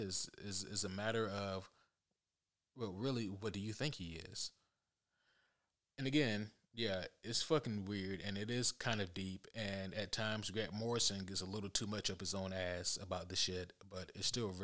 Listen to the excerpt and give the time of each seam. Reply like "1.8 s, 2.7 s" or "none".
none